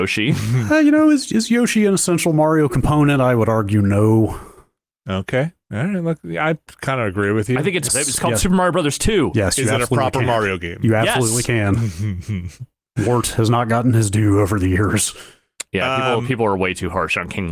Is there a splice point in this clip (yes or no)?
yes